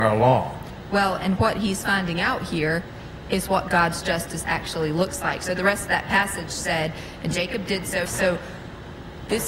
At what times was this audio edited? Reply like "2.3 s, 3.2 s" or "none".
8.0 s